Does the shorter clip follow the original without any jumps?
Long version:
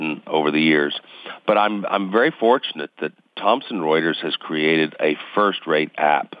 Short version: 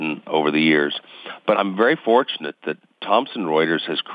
no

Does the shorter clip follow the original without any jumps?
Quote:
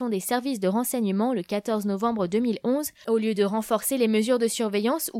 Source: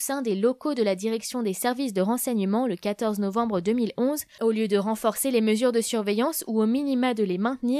yes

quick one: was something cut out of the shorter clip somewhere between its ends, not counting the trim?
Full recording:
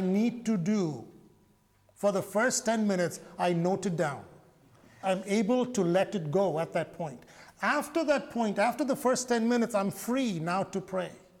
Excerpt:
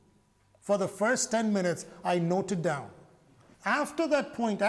yes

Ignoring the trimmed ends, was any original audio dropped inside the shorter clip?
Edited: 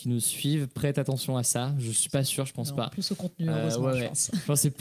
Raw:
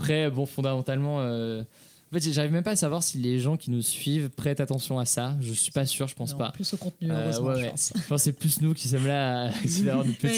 no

